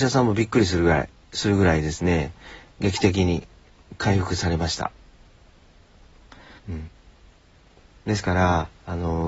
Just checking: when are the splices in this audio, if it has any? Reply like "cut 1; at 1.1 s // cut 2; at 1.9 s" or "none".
cut 1; at 6.6 s